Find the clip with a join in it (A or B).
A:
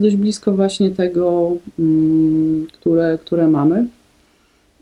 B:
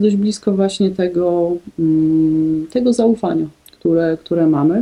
A